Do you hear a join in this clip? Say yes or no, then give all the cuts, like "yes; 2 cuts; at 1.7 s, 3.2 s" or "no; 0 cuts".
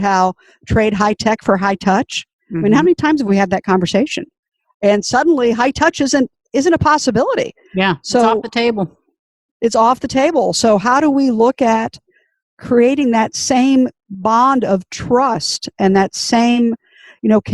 no; 0 cuts